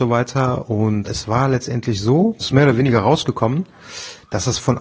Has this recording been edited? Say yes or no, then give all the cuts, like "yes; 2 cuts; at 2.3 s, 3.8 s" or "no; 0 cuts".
yes; 2 cuts; at 1.0 s, 2.4 s